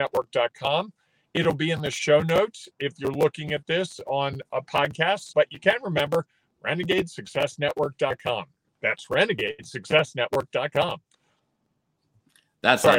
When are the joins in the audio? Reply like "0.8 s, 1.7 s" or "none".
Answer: 5.3 s

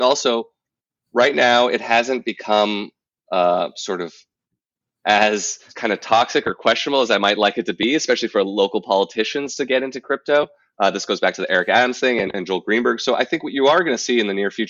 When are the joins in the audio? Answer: 5.7 s

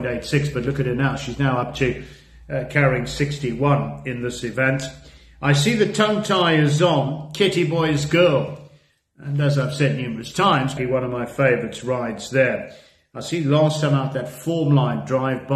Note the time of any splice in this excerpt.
10.8 s

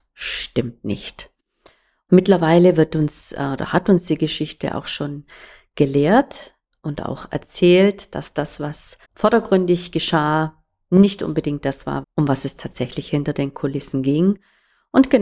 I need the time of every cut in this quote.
9.0 s, 12.0 s

